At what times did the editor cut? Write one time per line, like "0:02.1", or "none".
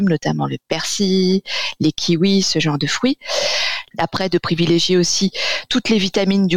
0:03.9